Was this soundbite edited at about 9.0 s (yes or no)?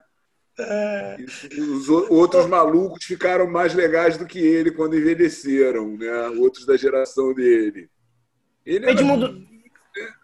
no